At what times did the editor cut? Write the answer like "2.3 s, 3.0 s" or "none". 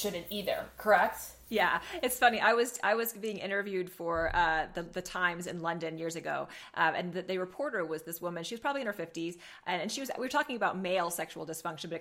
none